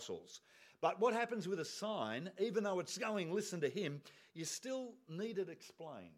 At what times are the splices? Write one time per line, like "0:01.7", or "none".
none